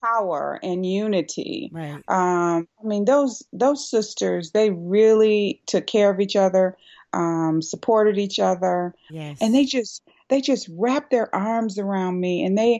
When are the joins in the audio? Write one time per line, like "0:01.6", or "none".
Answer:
0:09.1